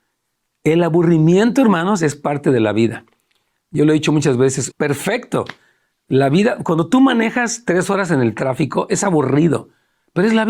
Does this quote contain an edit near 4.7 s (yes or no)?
yes